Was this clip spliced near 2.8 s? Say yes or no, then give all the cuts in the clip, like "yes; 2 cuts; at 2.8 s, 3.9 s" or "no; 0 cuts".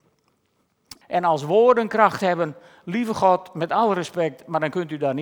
no; 1 cut; at 1.0 s